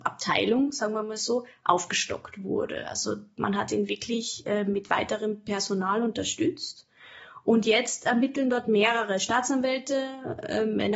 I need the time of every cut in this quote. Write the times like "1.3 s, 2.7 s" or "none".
none